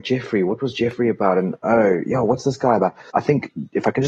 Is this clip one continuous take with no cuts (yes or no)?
no